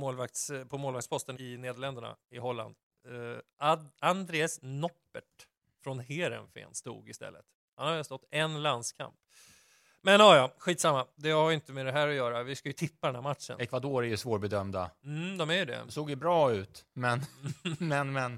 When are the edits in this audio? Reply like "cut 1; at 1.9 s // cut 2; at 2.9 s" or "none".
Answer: cut 1; at 1.4 s